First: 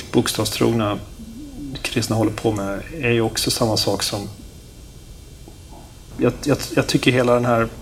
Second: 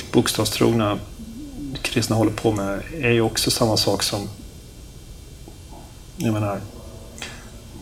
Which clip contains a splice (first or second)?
first